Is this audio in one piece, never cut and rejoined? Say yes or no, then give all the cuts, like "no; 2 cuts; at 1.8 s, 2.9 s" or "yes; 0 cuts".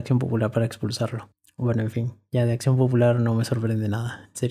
yes; 0 cuts